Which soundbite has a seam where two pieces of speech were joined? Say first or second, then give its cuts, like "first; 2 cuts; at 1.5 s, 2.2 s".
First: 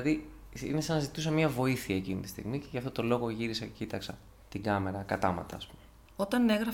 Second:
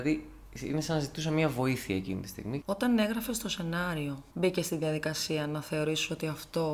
second; 2 cuts; at 2.6 s, 4.3 s